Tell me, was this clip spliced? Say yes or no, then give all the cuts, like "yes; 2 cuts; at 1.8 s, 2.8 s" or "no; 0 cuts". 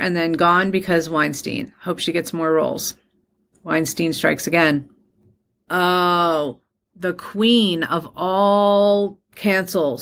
no; 0 cuts